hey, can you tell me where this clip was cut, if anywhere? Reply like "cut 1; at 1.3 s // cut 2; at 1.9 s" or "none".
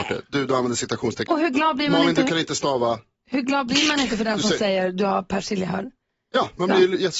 cut 1; at 1.3 s